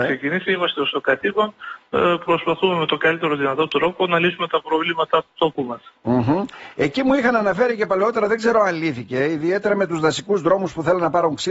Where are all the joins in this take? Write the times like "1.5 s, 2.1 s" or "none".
none